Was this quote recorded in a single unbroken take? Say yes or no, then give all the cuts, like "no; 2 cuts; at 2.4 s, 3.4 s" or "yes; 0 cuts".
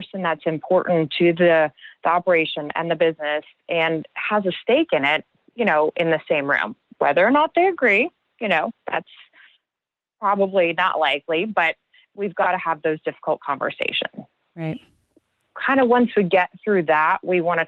yes; 0 cuts